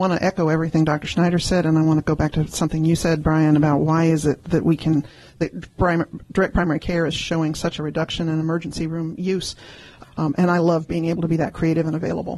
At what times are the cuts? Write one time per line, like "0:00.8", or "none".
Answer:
0:10.0